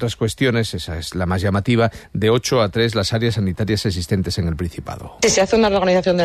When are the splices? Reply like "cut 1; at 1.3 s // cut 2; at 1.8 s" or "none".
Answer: none